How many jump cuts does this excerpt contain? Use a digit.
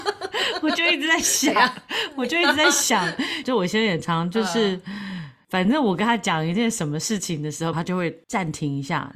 2